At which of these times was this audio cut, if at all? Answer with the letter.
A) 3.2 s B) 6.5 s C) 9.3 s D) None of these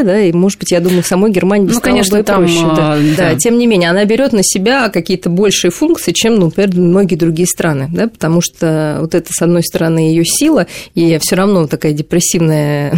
A